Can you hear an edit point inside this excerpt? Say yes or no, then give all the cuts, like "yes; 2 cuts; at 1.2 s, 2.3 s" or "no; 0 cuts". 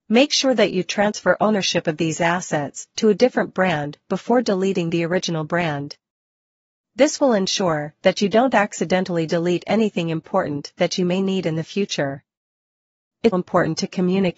yes; 1 cut; at 13.3 s